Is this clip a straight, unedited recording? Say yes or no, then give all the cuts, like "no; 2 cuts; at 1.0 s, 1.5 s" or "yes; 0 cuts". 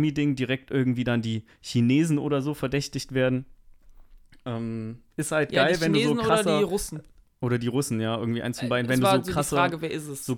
yes; 0 cuts